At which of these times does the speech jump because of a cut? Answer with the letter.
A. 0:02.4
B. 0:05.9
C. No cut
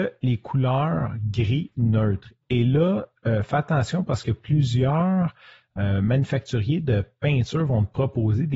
C